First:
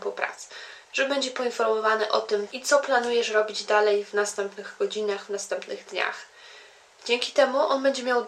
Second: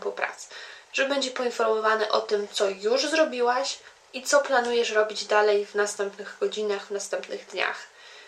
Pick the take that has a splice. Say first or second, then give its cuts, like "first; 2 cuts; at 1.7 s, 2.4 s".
first; 1 cut; at 2.5 s